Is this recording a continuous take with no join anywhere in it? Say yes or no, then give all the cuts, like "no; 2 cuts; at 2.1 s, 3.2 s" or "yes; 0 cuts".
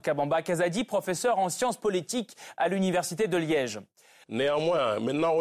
no; 1 cut; at 4.2 s